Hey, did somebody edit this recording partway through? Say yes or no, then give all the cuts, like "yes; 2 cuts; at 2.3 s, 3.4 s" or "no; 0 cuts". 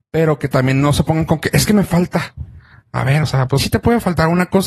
yes; 1 cut; at 3.6 s